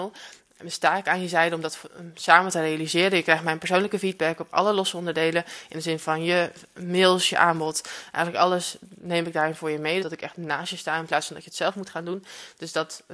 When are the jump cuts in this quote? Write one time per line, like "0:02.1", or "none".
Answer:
0:07.3
0:10.0